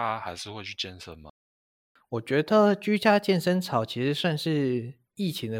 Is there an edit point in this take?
no; 0 cuts

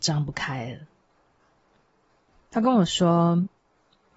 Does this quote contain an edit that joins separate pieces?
no; 0 cuts

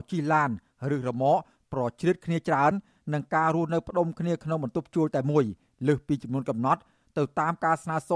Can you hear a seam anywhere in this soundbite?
no; 0 cuts

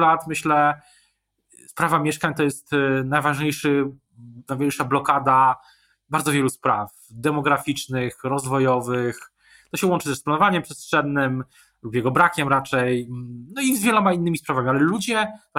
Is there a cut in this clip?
no; 0 cuts

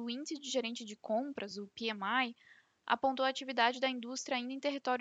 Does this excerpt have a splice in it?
no; 0 cuts

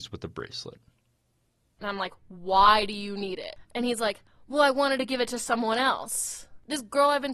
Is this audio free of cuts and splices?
no; 1 cut; at 1.6 s

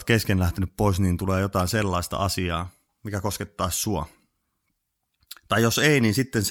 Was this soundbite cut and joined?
no; 0 cuts

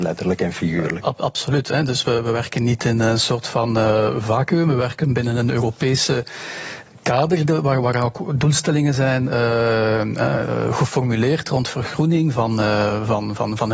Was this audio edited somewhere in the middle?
no; 0 cuts

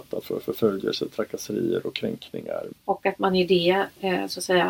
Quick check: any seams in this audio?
yes; 1 cut; at 2.7 s

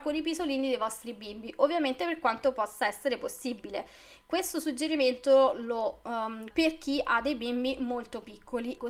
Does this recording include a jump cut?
yes; 1 cut; at 6.5 s

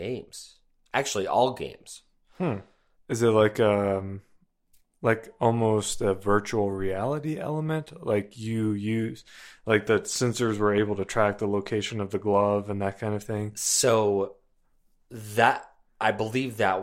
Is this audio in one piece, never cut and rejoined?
yes; 0 cuts

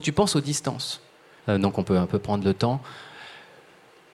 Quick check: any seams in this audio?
yes; 1 cut; at 1.4 s

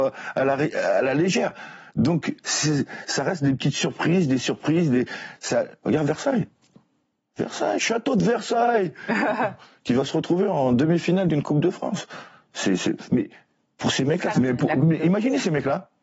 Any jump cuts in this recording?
yes; 2 cuts; at 7.8 s, 14.3 s

